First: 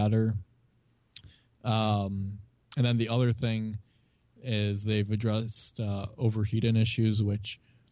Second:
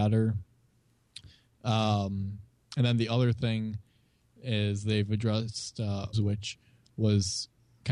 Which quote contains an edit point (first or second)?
second